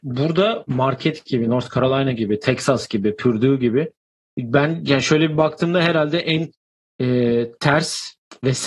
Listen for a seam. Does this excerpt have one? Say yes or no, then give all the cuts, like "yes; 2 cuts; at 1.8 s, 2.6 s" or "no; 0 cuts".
no; 0 cuts